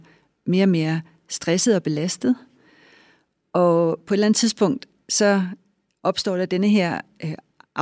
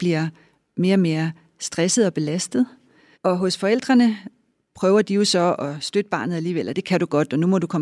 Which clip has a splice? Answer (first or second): second